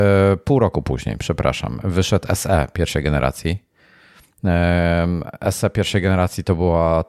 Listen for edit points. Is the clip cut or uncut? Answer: uncut